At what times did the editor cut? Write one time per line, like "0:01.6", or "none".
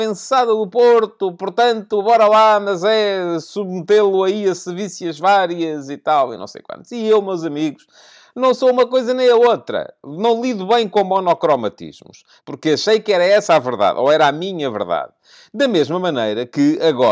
0:12.4